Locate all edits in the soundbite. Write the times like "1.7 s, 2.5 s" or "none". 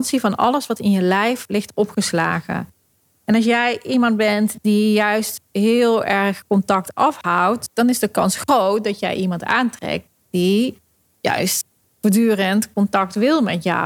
none